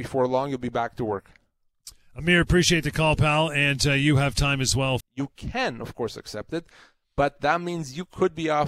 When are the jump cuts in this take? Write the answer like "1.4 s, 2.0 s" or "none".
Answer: 5.0 s